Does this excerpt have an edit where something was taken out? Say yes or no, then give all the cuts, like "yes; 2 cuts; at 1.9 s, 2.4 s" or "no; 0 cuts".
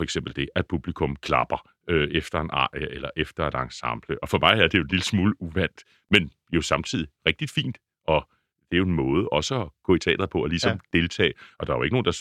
no; 0 cuts